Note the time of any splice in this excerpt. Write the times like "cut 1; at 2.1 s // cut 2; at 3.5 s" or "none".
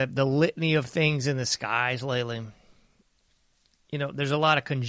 none